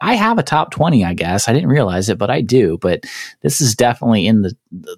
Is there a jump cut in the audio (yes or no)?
no